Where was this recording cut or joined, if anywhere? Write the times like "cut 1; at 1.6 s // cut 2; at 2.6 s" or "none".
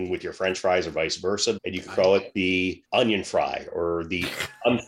cut 1; at 1.6 s // cut 2; at 2.8 s